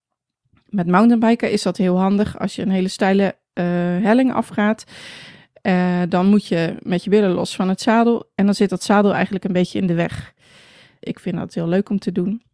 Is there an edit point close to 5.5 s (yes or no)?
no